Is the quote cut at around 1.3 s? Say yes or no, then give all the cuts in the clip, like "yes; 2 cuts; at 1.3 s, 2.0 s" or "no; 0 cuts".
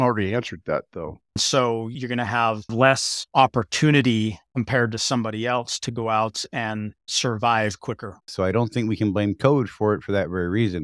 yes; 2 cuts; at 1.3 s, 8.2 s